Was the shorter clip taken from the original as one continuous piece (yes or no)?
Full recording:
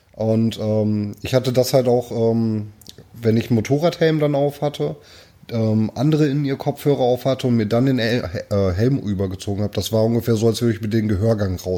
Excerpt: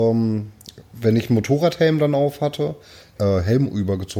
no